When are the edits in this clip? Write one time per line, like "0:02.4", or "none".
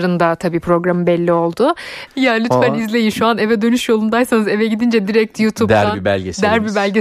0:02.1